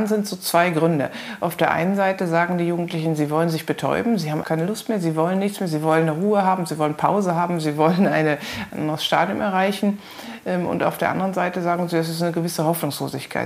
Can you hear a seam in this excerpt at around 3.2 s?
no; 2 cuts; at 4.4 s, 8.7 s

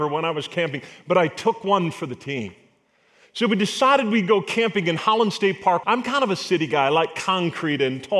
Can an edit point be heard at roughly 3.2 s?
no; 1 cut; at 5.8 s

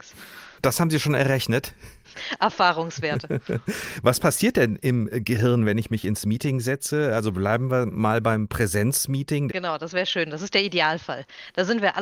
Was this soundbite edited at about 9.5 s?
yes; 1 cut; at 9.5 s

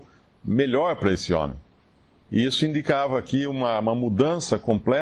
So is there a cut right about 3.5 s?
no; 1 cut; at 2.2 s

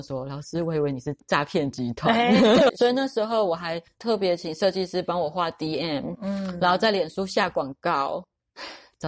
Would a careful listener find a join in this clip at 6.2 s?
no; 1 cut; at 2.7 s

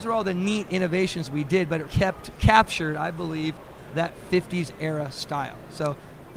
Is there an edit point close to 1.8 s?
yes; 1 cut; at 1.8 s

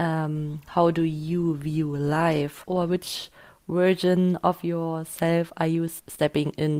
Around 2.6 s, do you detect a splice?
yes; 1 cut; at 2.6 s

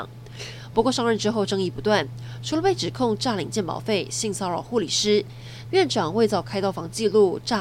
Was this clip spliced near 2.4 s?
no; 1 cut; at 5.6 s

